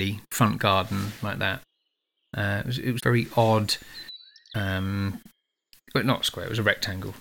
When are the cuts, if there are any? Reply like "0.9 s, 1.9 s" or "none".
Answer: 3.0 s